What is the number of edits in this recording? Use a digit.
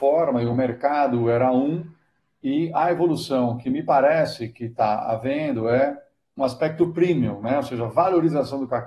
1